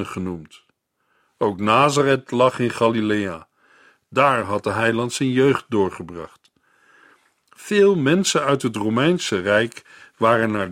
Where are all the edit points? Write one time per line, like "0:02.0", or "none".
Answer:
none